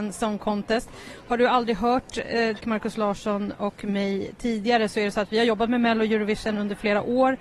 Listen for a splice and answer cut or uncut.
cut